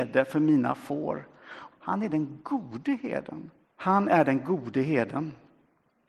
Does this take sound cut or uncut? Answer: cut